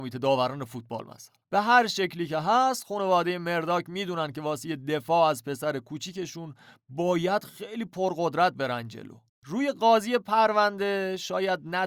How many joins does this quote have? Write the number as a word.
one